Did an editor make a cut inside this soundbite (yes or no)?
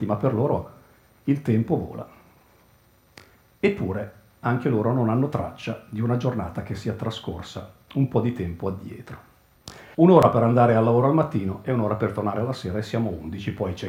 yes